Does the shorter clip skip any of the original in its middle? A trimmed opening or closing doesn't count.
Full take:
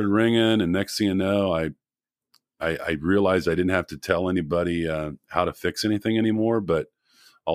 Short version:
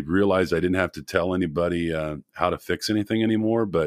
no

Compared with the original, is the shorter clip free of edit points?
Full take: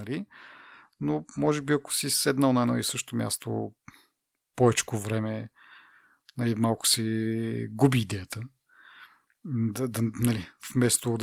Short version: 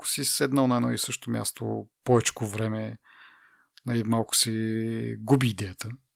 no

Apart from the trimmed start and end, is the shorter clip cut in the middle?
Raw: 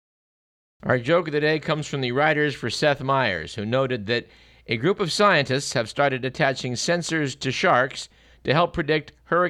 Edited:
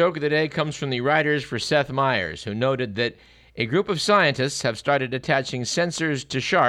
no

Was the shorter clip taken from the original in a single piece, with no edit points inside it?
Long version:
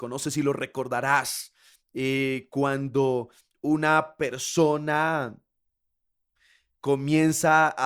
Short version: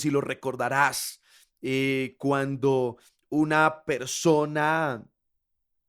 yes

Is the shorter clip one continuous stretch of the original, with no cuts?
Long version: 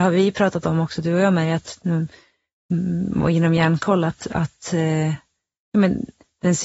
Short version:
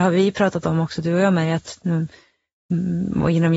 yes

